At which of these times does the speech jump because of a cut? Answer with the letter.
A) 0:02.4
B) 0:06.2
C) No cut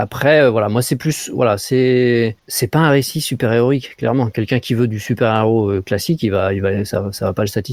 A